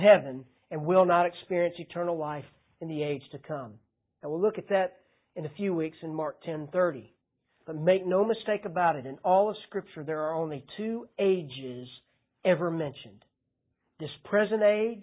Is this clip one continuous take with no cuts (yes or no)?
yes